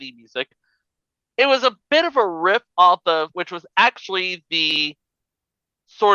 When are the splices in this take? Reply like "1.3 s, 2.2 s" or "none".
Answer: 3.3 s